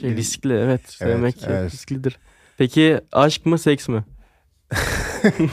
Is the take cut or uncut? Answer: uncut